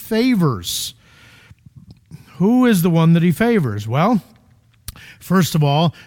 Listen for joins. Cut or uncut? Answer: uncut